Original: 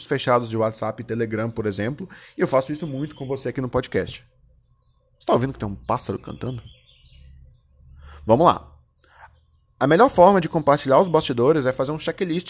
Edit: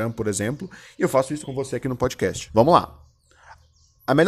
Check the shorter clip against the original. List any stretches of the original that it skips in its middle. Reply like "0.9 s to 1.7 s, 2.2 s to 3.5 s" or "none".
2.8 s to 3.1 s, 4.2 s to 8.2 s